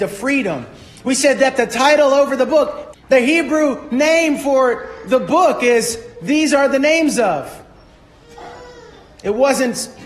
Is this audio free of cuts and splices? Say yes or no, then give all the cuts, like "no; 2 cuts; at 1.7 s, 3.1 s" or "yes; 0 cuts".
no; 1 cut; at 2.9 s